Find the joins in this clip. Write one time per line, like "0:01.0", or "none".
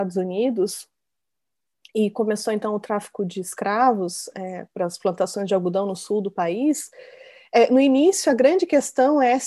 none

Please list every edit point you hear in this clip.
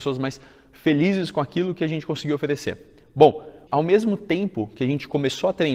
0:03.7

